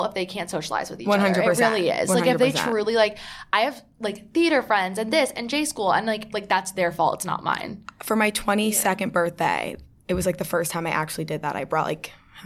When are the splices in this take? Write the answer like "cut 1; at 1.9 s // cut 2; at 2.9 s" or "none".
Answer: cut 1; at 6.3 s